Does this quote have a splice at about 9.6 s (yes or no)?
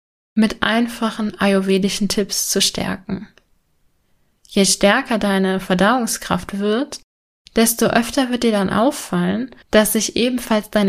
yes